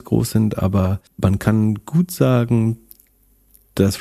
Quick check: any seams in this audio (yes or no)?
yes